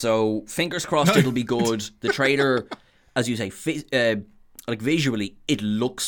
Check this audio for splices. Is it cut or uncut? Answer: uncut